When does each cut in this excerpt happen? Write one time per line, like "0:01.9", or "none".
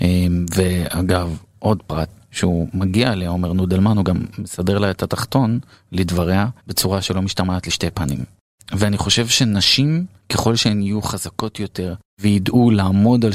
0:06.6